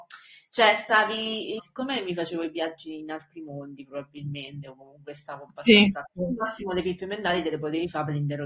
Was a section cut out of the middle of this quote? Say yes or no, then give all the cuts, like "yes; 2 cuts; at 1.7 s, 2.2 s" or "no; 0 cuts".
yes; 2 cuts; at 1.6 s, 6.1 s